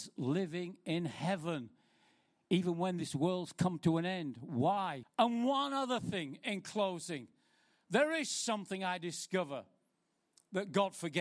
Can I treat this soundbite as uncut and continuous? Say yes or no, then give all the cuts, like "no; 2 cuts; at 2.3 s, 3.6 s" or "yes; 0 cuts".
no; 1 cut; at 5.0 s